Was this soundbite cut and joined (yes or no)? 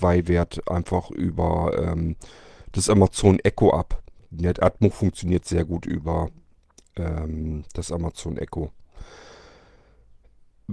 no